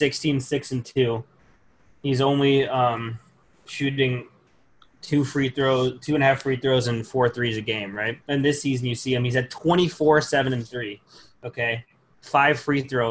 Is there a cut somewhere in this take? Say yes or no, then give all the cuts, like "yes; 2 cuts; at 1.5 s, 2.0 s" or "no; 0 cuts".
yes; 1 cut; at 8.2 s